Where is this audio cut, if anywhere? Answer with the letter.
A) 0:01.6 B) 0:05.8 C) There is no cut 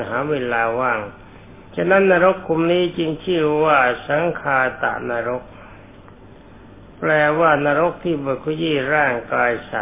A